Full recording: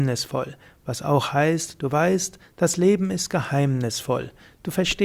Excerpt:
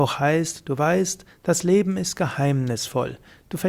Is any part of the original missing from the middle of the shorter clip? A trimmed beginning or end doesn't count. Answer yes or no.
no